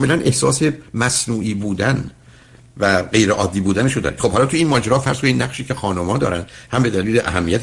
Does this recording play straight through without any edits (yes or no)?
yes